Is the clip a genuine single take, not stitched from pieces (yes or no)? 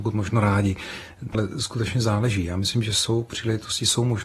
no